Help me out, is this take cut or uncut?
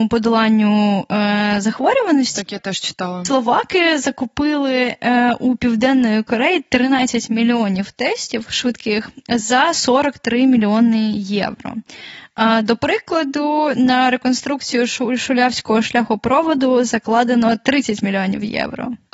uncut